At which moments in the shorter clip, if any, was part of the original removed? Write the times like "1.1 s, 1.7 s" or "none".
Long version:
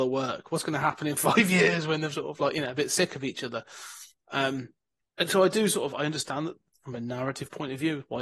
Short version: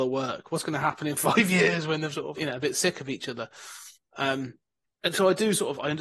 2.4 s